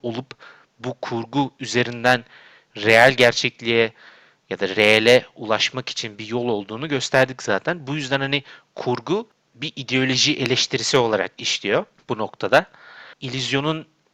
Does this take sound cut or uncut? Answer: cut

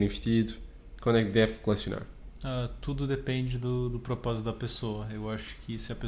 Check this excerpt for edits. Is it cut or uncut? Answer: uncut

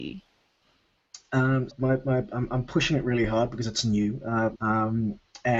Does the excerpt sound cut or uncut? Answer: cut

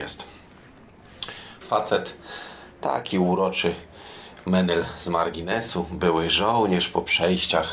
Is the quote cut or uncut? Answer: cut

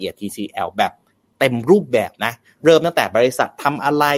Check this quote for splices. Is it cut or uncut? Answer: uncut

